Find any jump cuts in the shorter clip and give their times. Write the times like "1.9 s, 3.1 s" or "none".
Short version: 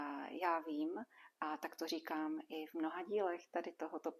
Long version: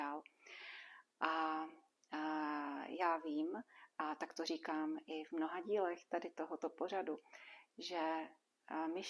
none